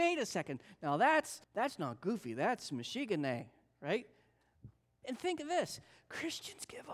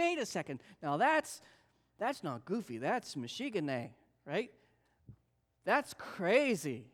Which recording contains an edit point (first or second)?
first